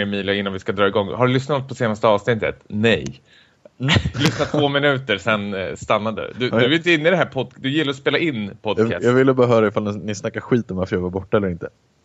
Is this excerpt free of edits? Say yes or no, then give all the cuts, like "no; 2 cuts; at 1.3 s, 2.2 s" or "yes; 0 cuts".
yes; 0 cuts